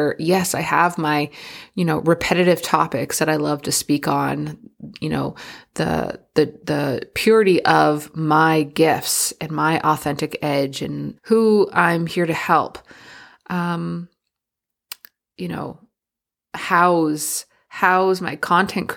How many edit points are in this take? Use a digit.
2